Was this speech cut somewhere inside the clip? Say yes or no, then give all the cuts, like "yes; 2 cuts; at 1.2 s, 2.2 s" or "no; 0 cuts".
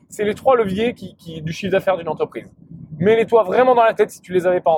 no; 0 cuts